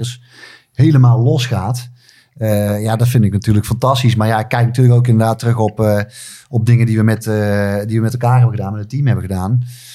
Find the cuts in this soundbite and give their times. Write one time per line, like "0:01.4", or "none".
none